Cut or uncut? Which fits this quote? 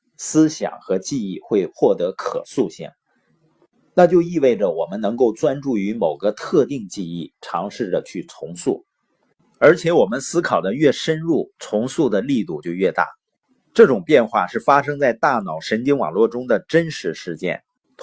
uncut